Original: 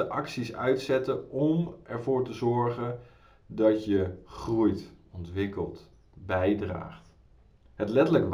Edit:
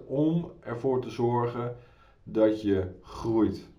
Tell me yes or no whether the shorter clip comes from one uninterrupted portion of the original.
yes